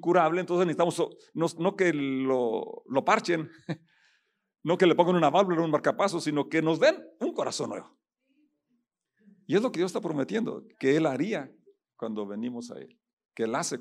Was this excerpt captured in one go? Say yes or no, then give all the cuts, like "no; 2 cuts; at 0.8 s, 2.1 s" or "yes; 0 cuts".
no; 2 cuts; at 1.6 s, 10.7 s